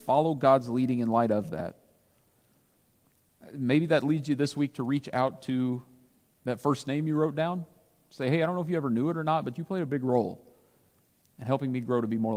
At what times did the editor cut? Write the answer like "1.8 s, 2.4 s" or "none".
none